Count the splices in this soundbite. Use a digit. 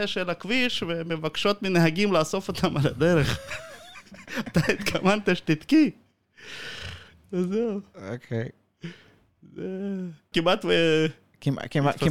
1